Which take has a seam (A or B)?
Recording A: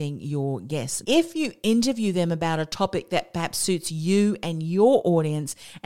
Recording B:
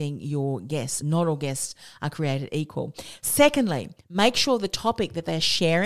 A